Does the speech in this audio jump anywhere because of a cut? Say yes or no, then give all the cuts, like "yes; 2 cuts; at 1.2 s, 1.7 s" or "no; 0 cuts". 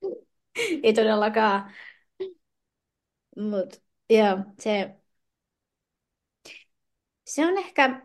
no; 0 cuts